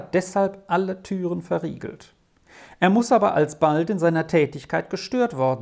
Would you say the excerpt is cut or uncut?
uncut